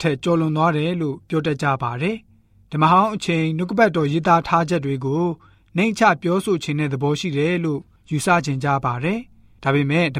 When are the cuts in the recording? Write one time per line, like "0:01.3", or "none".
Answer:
none